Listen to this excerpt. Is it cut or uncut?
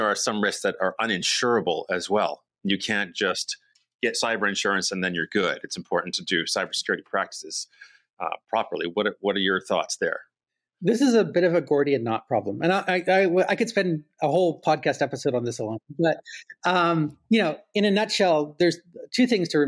uncut